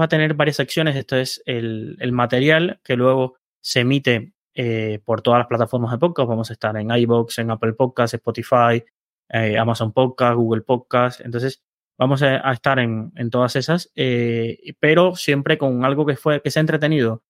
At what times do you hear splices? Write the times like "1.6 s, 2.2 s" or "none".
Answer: none